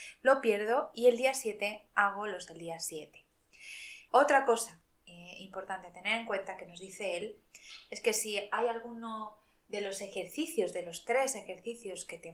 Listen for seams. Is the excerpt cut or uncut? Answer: cut